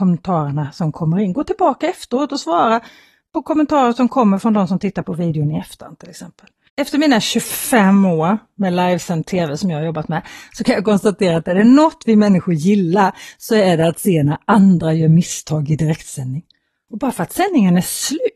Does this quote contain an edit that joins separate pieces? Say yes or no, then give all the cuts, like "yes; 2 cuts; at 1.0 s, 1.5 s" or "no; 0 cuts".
yes; 2 cuts; at 6.7 s, 16.9 s